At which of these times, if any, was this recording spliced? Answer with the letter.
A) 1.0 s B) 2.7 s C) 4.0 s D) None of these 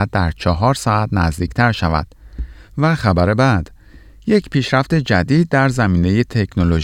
B